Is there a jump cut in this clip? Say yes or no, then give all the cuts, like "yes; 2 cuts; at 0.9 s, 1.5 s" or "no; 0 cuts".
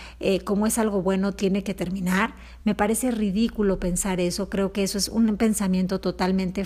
no; 0 cuts